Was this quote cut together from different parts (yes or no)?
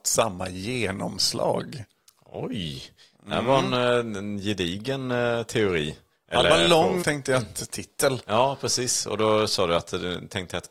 yes